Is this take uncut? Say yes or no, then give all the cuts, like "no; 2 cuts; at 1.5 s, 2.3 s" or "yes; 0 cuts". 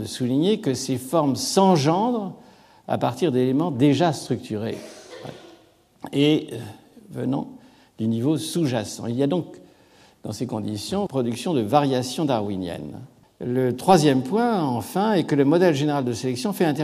no; 2 cuts; at 11.1 s, 13.2 s